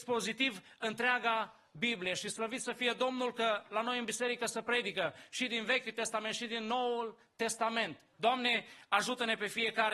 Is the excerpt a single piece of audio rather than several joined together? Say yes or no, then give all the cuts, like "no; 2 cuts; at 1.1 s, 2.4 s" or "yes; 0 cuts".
no; 1 cut; at 8.1 s